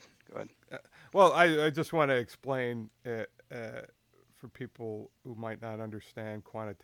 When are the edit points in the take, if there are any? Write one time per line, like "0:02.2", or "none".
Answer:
none